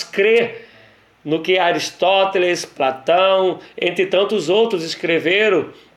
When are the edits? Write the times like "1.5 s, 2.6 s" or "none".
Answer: none